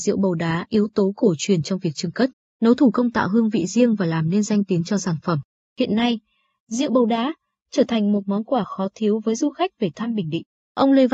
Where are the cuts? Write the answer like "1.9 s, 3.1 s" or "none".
none